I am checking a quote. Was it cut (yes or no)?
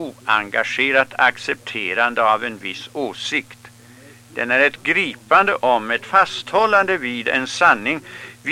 no